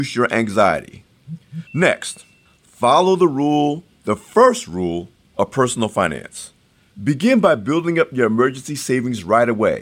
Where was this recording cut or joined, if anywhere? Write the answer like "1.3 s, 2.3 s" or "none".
1.7 s, 6.9 s